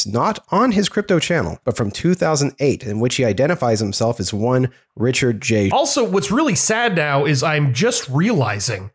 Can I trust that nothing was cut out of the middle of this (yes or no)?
no